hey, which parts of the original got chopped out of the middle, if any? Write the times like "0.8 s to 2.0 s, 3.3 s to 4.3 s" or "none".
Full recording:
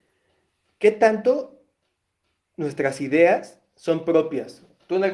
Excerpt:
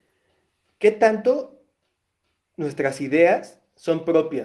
none